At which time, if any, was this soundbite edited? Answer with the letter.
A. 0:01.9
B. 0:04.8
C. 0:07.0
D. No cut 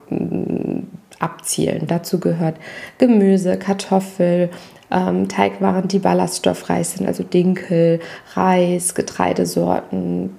A